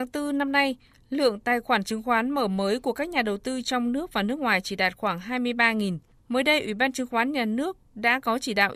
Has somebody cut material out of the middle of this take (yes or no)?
yes